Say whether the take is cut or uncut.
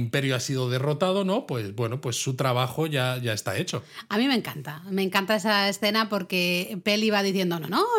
uncut